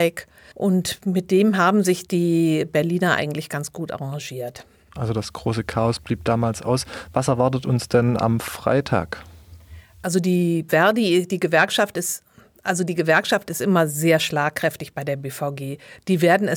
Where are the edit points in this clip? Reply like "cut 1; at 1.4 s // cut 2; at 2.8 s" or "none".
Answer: cut 1; at 10.7 s